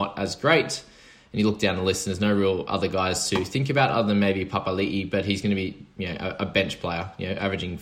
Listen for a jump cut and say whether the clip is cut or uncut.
uncut